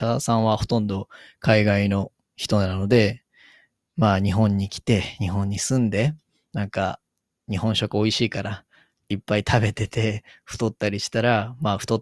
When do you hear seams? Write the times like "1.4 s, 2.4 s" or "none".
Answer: none